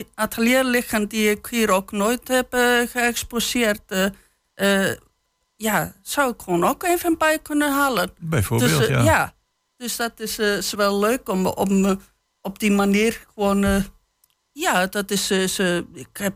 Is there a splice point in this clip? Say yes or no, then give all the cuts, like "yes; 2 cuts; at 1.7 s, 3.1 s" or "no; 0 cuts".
yes; 2 cuts; at 10.7 s, 14.5 s